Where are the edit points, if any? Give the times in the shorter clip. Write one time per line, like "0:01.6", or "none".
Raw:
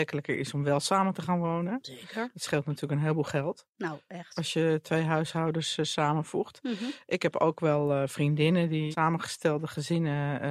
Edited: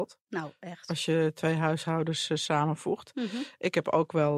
none